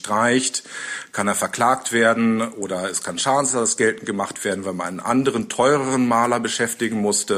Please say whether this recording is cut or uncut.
uncut